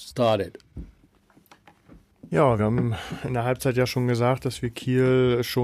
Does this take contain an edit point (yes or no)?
no